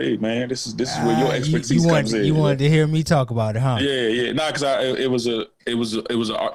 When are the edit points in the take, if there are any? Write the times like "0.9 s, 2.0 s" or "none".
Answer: none